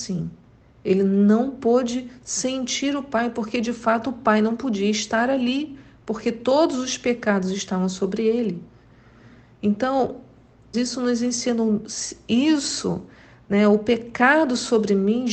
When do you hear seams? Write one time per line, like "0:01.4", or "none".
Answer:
0:10.7